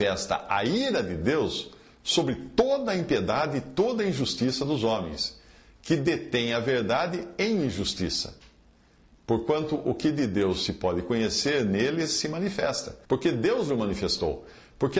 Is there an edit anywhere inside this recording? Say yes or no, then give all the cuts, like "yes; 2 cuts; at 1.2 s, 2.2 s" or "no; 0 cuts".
yes; 1 cut; at 13.0 s